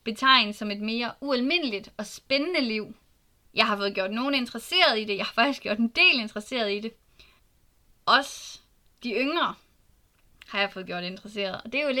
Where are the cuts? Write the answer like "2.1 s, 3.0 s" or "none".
3.4 s